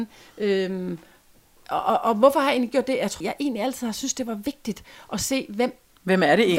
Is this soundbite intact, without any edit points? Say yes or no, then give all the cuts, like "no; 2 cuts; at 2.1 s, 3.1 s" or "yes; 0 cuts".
no; 1 cut; at 3.2 s